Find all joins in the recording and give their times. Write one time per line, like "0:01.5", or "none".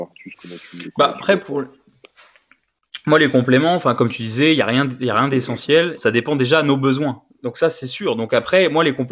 0:06.0
0:07.3